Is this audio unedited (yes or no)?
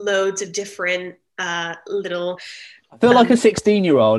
yes